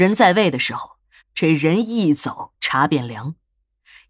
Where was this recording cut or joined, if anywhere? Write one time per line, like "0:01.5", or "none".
0:01.2